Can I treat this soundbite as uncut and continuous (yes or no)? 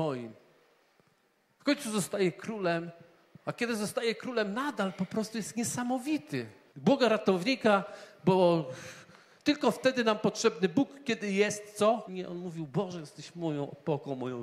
no